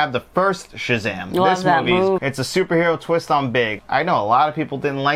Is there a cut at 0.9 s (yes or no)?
no